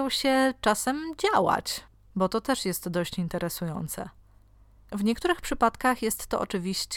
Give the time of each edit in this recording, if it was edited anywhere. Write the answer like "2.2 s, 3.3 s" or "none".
none